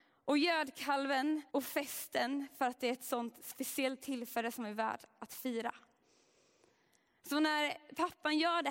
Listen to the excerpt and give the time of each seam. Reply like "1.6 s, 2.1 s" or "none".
1.5 s